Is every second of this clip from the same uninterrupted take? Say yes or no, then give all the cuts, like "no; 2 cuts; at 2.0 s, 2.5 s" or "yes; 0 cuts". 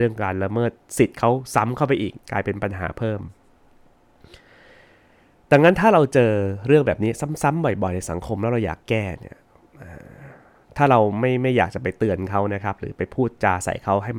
yes; 0 cuts